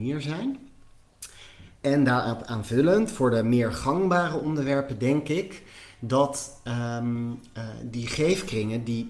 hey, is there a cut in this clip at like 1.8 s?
yes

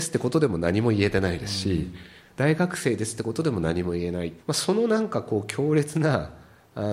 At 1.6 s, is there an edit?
no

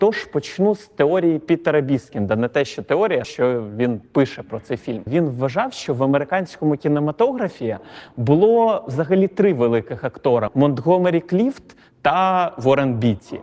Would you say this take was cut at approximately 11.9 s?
no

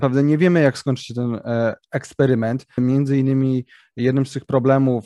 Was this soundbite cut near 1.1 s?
no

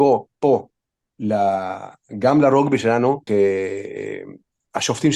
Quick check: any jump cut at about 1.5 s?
no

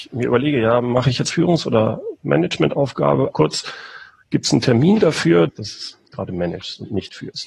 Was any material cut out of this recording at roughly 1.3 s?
yes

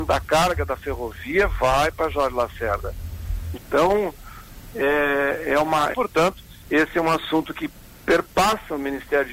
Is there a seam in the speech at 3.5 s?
yes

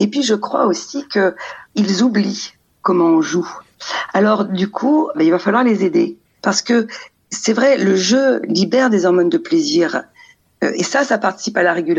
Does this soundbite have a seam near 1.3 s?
no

